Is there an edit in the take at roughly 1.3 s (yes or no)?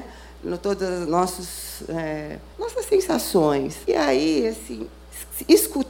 no